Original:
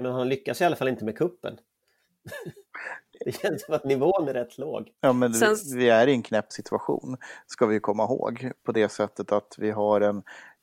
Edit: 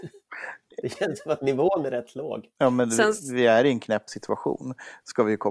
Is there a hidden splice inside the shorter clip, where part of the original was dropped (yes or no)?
no